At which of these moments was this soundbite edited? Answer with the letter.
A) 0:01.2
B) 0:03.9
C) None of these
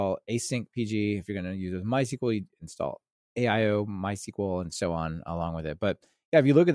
C